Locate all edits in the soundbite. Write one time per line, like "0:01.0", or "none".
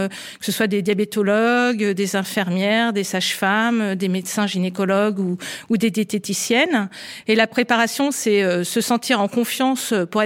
0:07.2